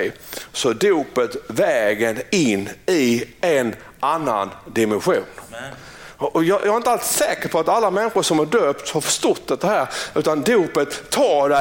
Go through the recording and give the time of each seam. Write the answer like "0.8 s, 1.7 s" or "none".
none